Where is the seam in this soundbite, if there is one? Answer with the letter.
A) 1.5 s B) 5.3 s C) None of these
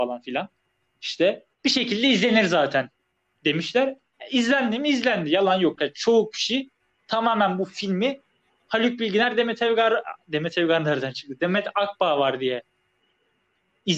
A